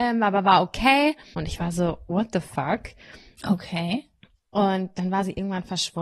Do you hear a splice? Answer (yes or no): yes